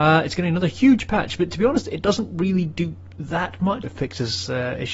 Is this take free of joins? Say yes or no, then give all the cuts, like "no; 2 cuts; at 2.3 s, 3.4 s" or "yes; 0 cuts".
no; 1 cut; at 3.8 s